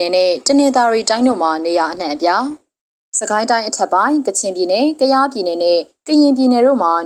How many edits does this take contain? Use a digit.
0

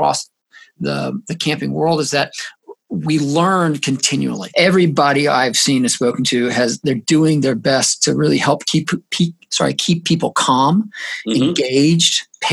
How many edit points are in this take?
1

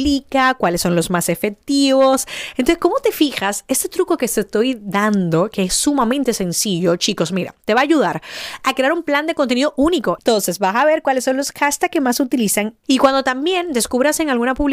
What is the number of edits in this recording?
2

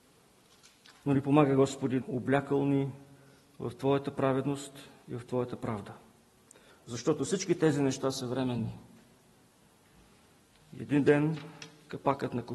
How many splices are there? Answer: 2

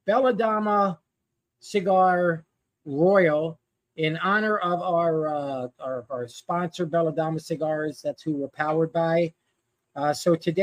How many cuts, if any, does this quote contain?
0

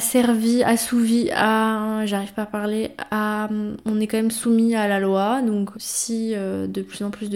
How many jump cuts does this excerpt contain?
1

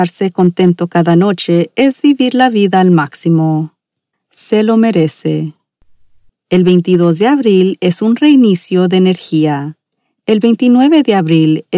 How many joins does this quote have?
2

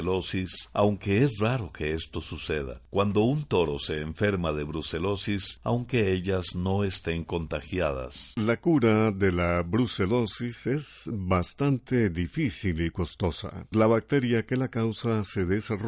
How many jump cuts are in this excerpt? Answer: 2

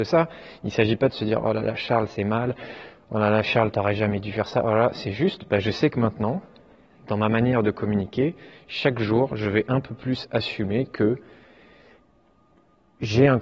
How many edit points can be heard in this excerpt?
0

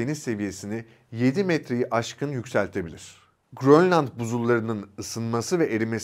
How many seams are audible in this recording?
1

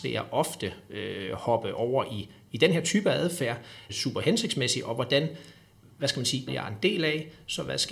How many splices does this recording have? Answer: 2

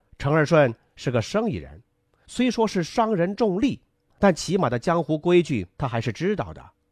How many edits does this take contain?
0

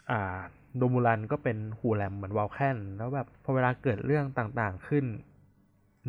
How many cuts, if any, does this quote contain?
1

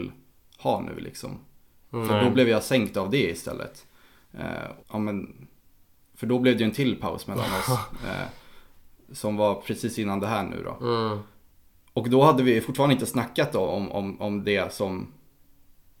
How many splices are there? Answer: 1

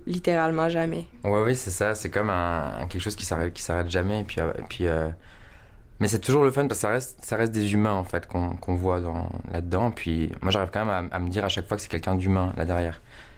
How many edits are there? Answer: 0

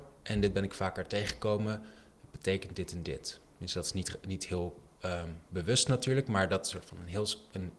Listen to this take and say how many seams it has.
0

